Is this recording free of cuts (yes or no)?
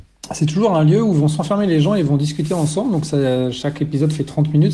yes